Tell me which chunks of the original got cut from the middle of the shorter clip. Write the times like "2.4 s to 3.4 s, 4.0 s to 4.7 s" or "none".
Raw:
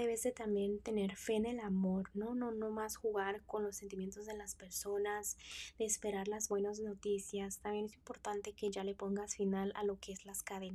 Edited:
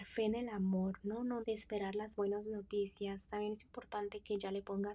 2.5 s to 5.7 s